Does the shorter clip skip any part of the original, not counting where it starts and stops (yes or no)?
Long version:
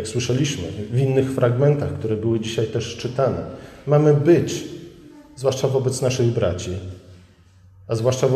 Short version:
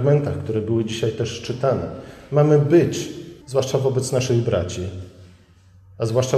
yes